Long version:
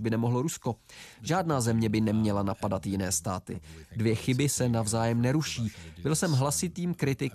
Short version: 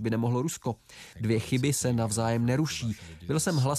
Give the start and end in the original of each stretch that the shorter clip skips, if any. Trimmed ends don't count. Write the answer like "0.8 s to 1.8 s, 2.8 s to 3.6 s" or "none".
1.1 s to 3.9 s